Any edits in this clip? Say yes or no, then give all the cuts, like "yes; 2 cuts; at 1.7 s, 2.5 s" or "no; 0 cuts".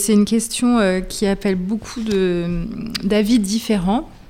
no; 0 cuts